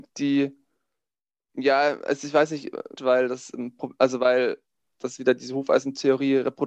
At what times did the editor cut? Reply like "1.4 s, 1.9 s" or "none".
3.0 s